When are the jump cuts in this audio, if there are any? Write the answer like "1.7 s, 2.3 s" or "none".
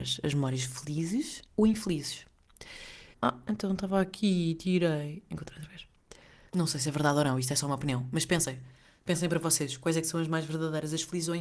1.5 s, 3.1 s, 6.5 s